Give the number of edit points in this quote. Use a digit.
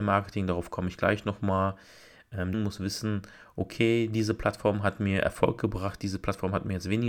1